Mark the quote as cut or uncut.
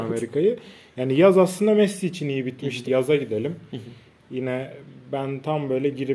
cut